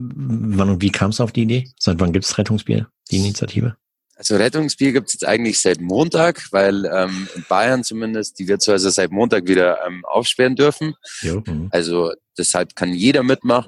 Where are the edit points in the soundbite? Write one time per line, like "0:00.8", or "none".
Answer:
0:01.7
0:11.4